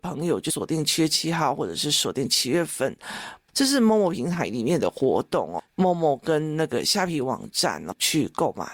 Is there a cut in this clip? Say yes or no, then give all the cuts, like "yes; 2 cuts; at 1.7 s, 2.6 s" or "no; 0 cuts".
yes; 2 cuts; at 3.5 s, 5.7 s